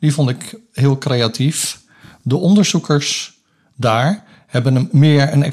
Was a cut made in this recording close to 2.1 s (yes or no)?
no